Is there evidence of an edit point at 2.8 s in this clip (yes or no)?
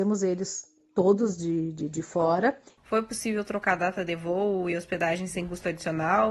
yes